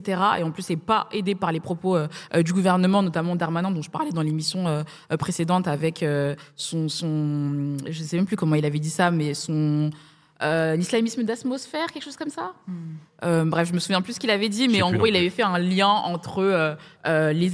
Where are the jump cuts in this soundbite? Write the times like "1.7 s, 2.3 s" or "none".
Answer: none